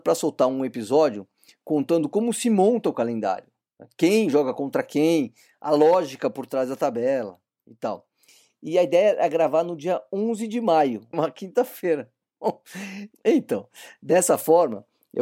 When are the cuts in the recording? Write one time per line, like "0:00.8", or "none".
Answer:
0:11.1
0:13.1

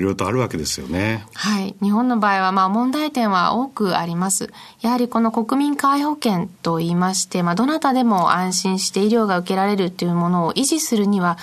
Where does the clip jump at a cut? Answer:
none

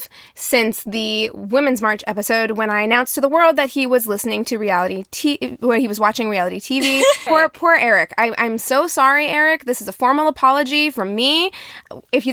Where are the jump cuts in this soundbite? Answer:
0:07.3

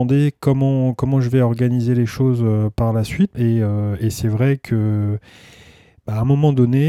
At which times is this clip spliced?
0:03.3

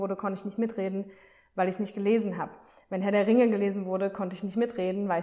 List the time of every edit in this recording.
none

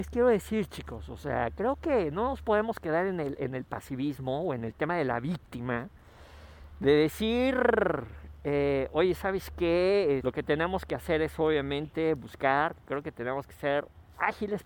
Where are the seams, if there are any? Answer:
0:10.2

